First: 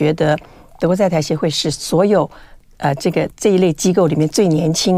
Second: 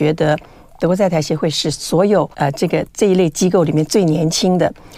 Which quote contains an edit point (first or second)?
second